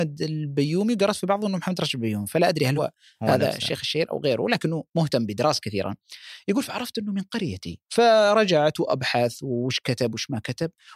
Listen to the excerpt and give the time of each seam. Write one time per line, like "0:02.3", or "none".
0:02.8
0:07.9